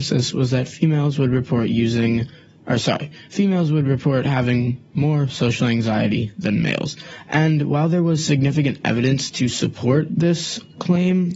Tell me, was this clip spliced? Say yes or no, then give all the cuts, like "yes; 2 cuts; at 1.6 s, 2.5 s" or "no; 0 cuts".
no; 0 cuts